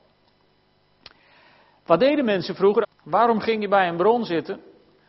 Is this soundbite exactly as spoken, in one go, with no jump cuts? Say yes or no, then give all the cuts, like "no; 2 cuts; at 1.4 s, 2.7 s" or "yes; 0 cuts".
no; 1 cut; at 2.8 s